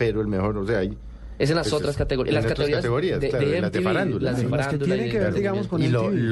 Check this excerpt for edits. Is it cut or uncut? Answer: uncut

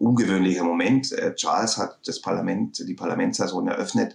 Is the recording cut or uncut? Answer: uncut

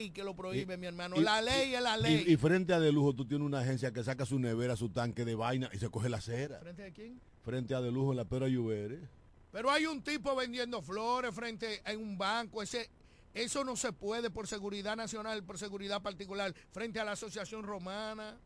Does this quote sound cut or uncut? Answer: uncut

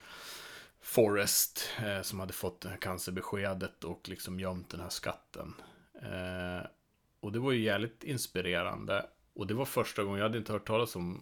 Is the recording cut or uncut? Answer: cut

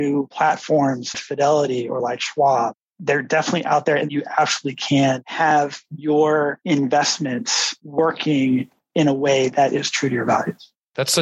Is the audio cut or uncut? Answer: cut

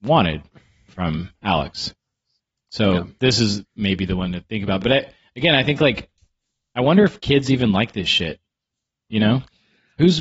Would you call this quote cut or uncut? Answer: uncut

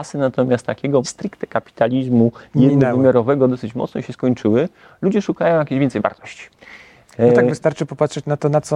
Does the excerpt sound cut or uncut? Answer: cut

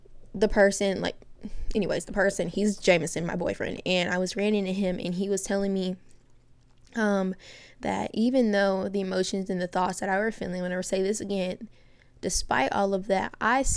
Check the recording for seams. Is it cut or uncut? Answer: uncut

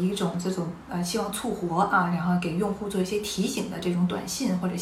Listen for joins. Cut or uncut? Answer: uncut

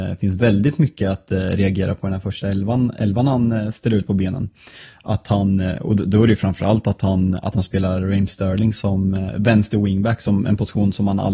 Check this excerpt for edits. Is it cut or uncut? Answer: uncut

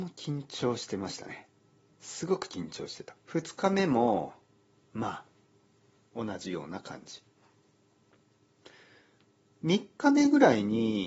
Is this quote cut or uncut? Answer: cut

